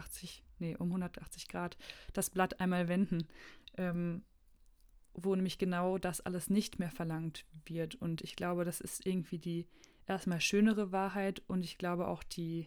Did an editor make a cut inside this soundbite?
no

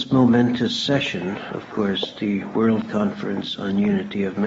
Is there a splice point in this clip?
yes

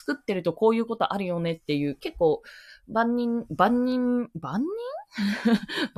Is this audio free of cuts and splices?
yes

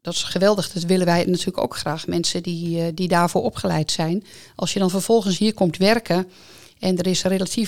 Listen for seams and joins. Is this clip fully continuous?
yes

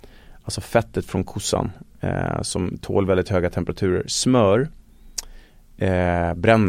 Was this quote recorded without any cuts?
yes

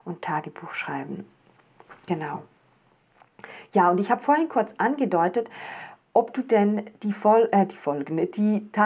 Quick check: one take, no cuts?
yes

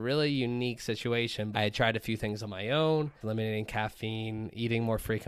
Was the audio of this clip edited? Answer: yes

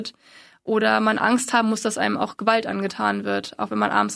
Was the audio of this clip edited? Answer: no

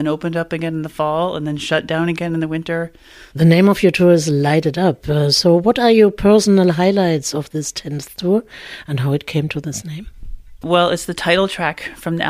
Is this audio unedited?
no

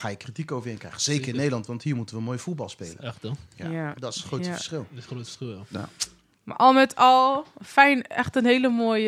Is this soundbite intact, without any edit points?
yes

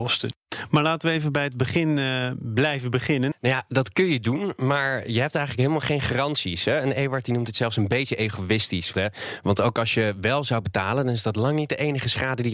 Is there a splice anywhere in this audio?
yes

